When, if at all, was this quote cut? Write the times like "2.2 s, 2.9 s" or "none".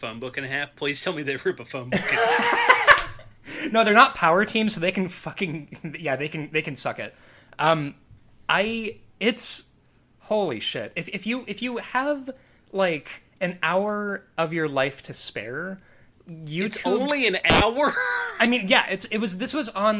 none